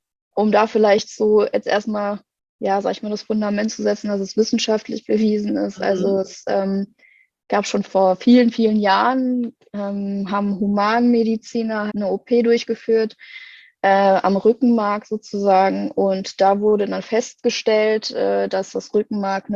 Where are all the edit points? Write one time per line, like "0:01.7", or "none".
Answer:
0:11.9